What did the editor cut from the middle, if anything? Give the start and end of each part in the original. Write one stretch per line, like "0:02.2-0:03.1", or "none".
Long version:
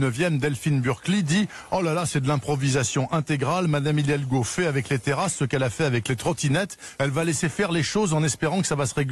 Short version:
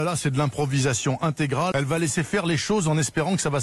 0:03.6-0:07.0